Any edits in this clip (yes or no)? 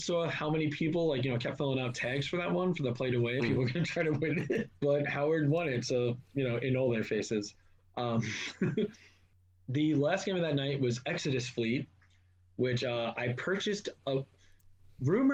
yes